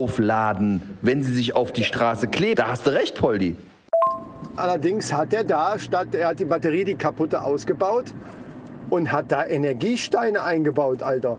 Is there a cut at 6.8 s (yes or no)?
no